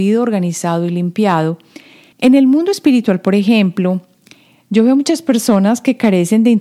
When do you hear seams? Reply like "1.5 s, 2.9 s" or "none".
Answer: 2.1 s